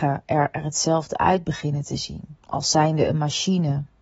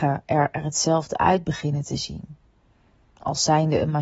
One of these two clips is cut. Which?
first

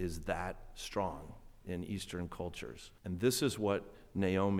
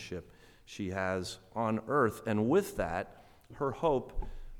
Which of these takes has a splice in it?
first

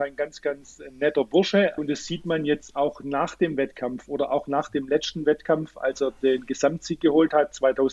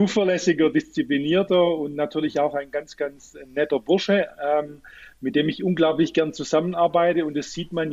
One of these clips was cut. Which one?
first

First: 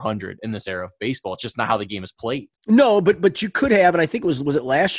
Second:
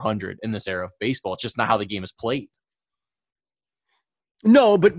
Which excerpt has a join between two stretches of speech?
first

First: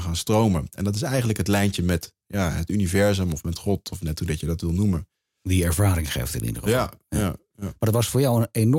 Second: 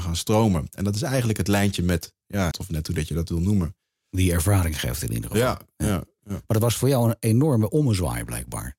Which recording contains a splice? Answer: second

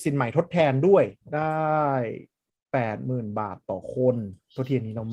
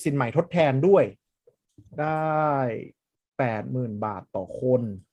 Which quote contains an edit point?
first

